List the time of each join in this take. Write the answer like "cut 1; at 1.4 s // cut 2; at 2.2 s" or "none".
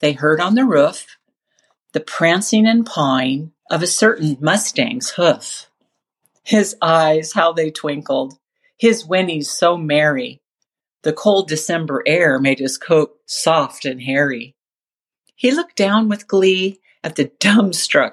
none